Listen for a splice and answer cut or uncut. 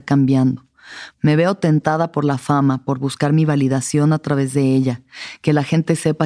cut